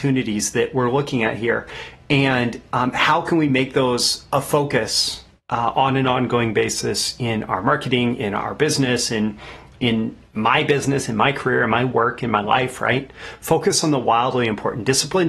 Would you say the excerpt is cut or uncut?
uncut